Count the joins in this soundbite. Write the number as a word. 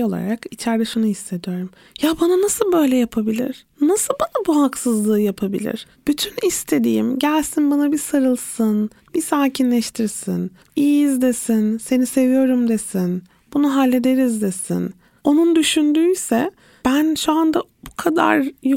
three